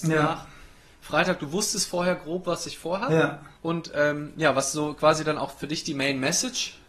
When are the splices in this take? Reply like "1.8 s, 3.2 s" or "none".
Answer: 3.6 s